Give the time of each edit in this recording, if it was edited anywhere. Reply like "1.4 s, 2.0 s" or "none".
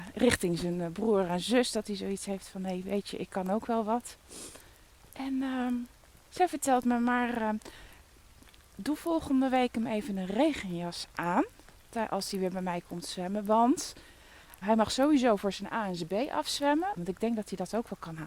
14.6 s, 17.0 s